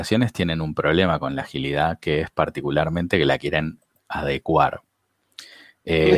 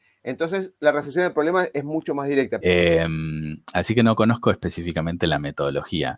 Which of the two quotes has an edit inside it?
second; 1 cut; at 2.6 s

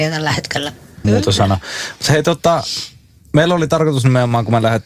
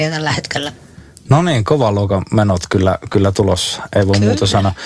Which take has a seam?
first; 1 cut; at 1.0 s

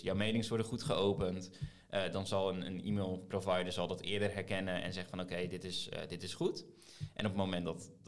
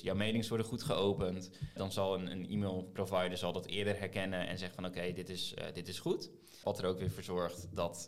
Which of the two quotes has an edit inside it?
second; 2 cuts; at 1.8 s, 6.6 s

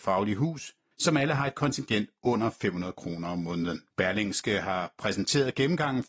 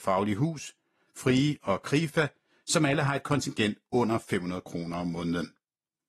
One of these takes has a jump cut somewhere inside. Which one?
first; 2 cuts; at 0.9 s, 3.9 s

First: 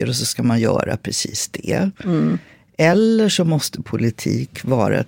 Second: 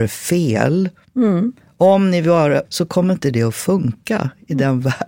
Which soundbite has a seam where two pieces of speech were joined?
second; 1 cut; at 2.7 s

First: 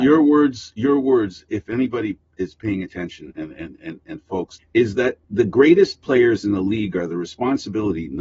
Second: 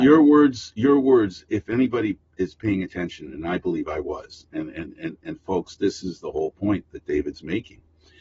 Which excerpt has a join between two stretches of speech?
first; 2 cuts; at 3.3 s, 4.6 s

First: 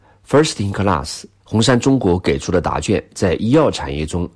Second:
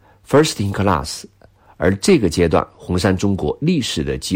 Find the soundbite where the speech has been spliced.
first; 1 cut; at 1.4 s

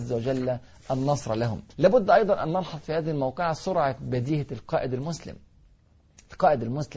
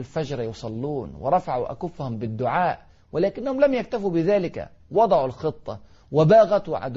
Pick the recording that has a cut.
first; 1 cut; at 1.7 s

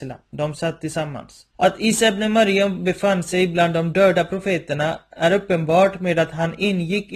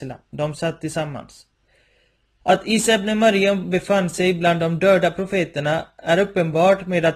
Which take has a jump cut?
first; 1 cut; at 1.5 s

